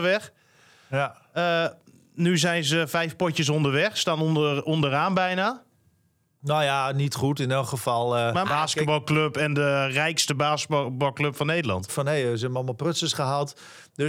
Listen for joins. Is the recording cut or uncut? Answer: cut